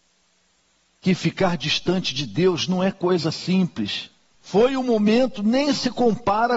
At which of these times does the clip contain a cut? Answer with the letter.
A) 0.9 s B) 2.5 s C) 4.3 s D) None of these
C